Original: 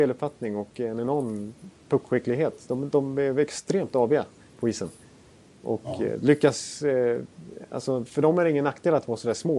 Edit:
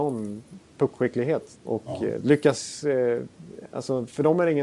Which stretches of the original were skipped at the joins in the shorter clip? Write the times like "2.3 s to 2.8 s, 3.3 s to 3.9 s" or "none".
2.7 s to 5.6 s